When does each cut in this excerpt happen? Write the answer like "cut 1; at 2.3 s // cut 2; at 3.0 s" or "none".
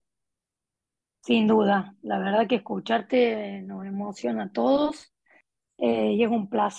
cut 1; at 1.1 s